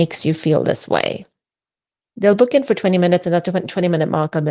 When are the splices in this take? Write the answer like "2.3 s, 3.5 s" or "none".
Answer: 2.1 s